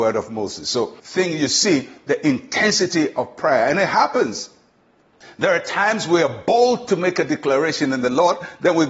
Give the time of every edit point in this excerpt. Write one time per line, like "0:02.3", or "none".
0:01.0